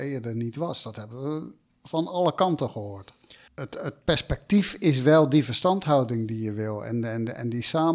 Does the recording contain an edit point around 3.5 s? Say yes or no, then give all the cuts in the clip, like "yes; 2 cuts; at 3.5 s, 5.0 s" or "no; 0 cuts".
yes; 1 cut; at 3.5 s